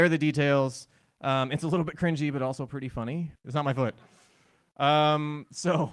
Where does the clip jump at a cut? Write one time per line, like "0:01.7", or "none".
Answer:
0:03.3